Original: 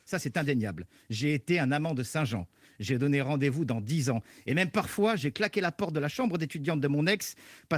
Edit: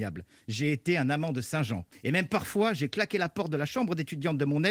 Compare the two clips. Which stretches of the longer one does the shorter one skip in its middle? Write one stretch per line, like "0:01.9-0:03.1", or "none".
0:02.5-0:04.3